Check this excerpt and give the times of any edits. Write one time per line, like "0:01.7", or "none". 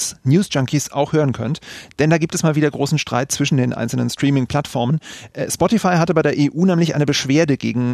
none